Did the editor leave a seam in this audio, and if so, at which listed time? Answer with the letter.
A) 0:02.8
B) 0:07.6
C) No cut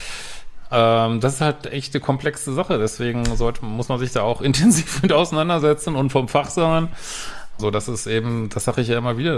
B